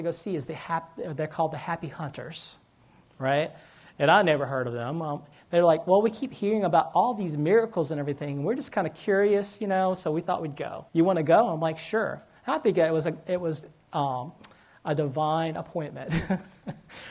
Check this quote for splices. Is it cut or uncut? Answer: cut